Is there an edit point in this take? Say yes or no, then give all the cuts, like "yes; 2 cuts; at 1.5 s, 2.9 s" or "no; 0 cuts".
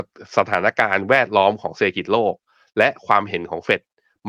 no; 0 cuts